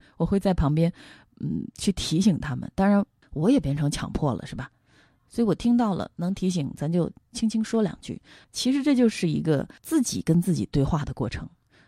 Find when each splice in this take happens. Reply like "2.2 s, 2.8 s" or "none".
3.2 s, 8.4 s, 9.8 s